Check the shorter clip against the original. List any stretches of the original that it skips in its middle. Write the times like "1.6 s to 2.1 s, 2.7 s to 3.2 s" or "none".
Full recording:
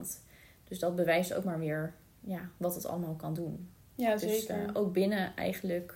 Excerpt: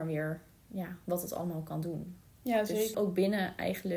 4.5 s to 4.7 s